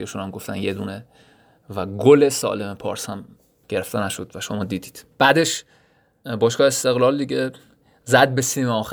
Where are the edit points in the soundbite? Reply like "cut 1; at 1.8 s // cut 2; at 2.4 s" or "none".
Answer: cut 1; at 5.1 s